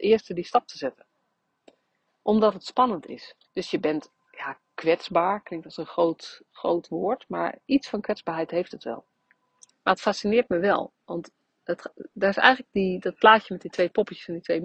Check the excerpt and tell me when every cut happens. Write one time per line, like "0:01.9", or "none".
0:03.5
0:09.7